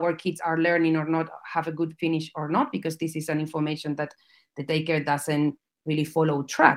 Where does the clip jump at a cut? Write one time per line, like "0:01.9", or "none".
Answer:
none